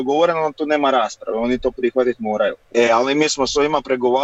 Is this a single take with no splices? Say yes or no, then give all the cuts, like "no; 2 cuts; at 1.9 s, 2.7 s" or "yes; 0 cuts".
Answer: no; 1 cut; at 2.6 s